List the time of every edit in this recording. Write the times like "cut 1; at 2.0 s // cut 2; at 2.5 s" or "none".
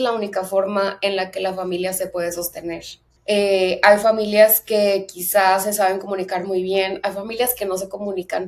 cut 1; at 3.2 s